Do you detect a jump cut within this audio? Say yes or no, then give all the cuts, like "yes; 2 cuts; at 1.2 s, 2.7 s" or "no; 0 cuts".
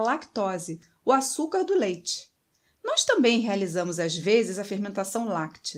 no; 0 cuts